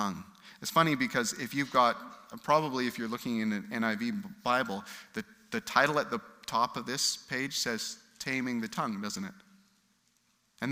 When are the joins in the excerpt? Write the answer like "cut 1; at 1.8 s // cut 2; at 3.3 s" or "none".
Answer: none